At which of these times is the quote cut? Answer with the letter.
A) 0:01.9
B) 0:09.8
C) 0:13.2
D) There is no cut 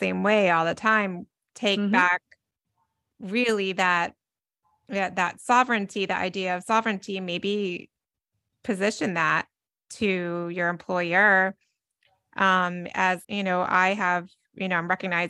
C